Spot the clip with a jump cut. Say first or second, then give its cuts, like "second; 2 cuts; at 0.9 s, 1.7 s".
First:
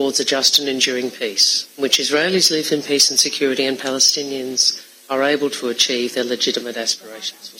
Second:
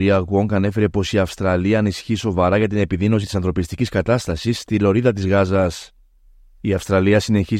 first; 1 cut; at 1.7 s